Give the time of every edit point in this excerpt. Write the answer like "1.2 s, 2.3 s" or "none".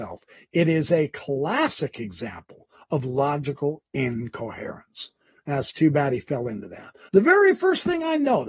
7.1 s

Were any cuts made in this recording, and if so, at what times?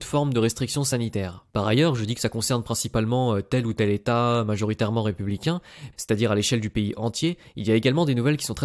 1.5 s, 5.9 s

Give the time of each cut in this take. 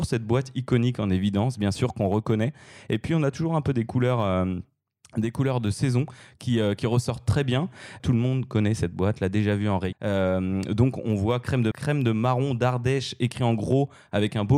8.0 s, 9.9 s, 11.7 s

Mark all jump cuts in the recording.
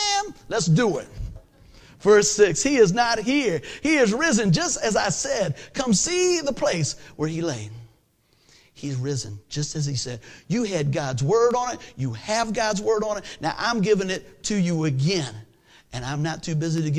none

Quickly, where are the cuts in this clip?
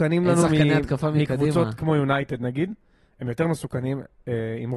none

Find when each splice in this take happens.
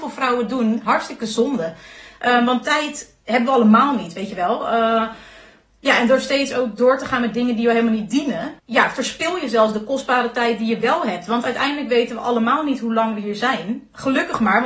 8.6 s

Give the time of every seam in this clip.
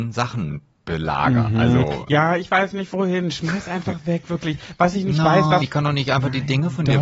5.6 s

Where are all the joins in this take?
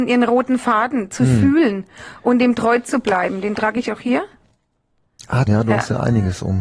5.5 s

